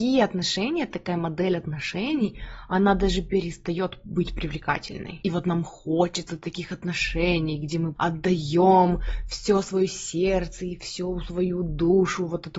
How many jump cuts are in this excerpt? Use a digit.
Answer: 2